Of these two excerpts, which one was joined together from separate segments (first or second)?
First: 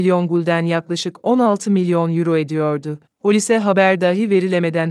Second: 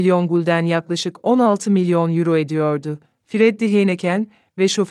first